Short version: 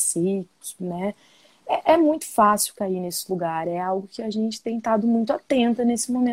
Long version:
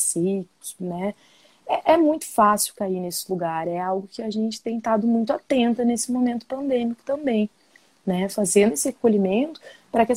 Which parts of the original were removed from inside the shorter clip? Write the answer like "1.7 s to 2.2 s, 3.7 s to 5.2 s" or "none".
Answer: none